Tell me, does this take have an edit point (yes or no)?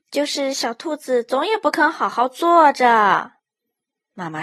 yes